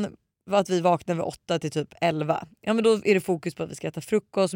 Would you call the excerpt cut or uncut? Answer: uncut